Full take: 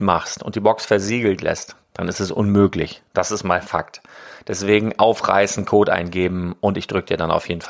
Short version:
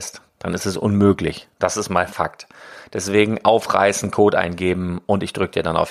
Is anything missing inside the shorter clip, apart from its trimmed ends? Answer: no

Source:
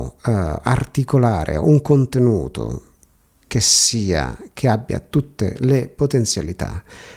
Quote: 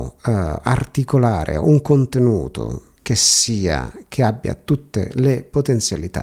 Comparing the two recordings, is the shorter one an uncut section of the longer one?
no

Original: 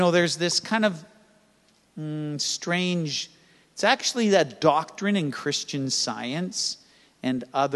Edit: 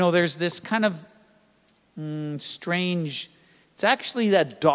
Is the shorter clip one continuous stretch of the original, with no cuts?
yes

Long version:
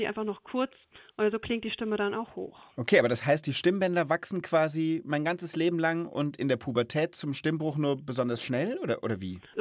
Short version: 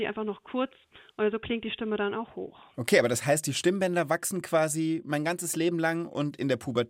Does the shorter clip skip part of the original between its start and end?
no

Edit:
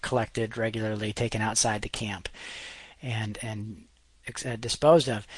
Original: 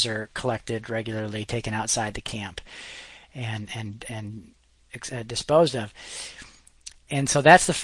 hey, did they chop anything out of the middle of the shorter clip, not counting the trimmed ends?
yes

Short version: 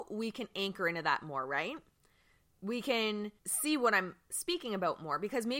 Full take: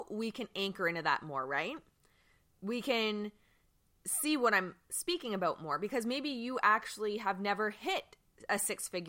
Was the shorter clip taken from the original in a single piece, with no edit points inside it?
no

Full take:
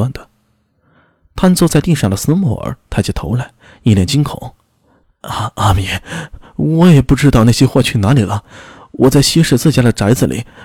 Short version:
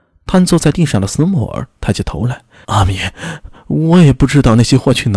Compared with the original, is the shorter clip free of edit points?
no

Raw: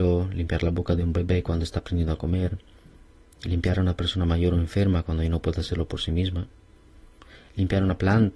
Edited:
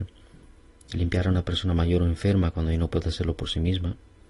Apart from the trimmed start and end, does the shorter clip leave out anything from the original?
no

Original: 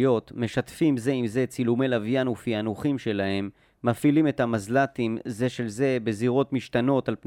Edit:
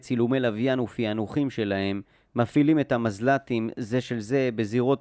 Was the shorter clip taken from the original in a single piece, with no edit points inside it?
yes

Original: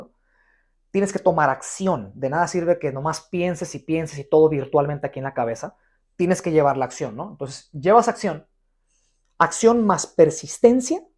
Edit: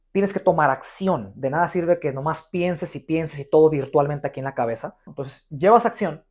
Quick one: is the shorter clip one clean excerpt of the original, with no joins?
no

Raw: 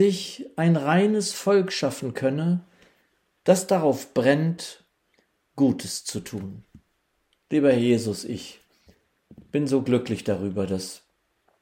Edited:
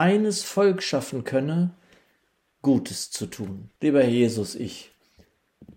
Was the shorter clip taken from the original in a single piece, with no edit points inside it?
no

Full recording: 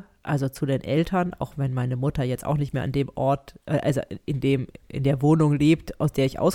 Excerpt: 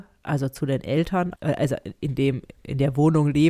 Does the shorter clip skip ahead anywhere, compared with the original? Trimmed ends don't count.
yes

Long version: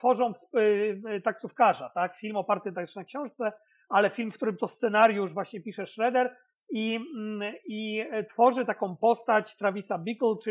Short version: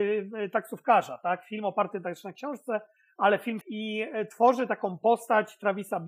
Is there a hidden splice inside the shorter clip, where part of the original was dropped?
yes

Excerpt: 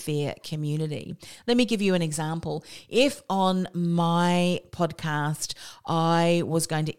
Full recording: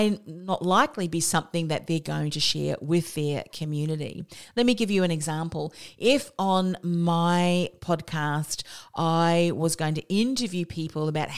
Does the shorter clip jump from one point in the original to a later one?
no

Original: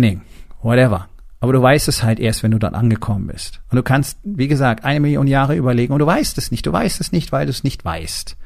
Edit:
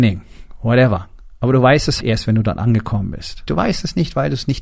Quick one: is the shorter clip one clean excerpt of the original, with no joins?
no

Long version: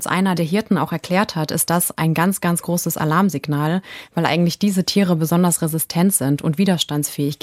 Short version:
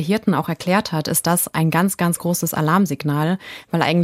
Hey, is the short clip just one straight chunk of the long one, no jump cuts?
yes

